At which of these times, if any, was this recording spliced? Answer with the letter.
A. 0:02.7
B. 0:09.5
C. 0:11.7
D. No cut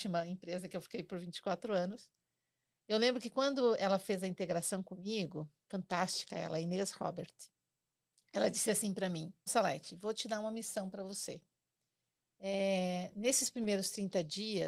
B